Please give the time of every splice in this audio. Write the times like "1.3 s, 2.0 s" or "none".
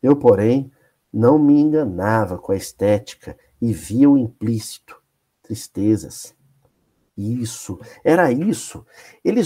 7.1 s